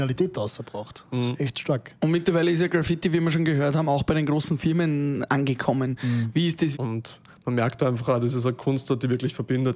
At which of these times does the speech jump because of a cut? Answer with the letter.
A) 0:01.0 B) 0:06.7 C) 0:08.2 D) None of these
B